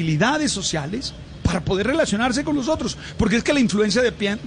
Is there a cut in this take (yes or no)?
no